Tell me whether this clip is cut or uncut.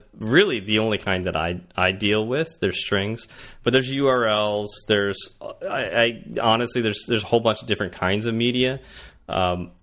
uncut